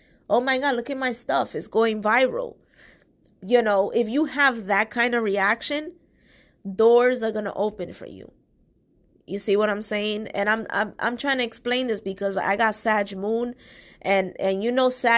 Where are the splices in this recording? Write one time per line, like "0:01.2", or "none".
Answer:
none